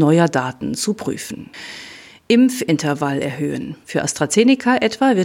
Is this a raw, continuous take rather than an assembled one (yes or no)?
no